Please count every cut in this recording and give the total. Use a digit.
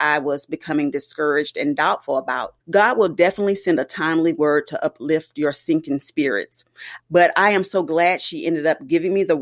2